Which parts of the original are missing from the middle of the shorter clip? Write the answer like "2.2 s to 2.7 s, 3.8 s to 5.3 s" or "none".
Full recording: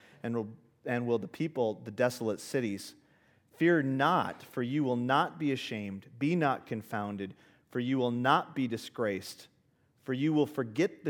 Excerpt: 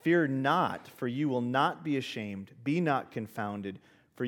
none